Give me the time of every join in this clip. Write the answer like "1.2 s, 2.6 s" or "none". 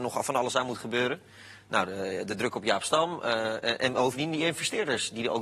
none